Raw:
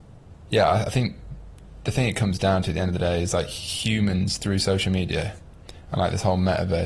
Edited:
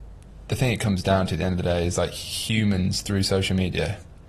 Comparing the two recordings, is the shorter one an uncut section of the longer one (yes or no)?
yes